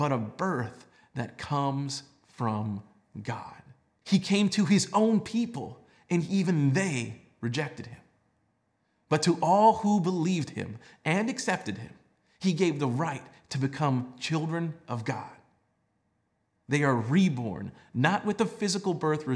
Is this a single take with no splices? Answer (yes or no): no